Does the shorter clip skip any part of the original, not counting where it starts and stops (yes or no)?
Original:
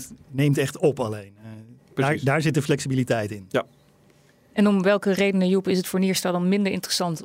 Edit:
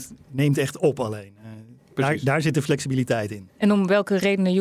yes